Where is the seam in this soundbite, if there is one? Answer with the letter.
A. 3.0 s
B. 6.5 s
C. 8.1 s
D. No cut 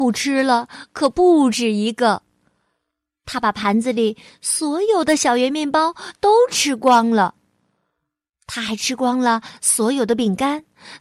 D